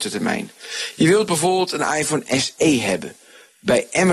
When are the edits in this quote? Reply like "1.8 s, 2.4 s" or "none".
none